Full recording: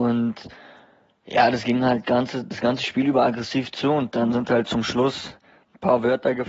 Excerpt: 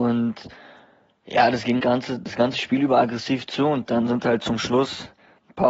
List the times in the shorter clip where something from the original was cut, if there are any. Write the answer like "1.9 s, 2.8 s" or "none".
1.8 s